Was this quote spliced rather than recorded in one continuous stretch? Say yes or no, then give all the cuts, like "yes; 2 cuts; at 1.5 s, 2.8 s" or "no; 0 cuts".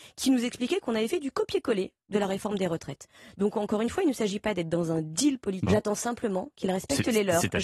yes; 1 cut; at 5.6 s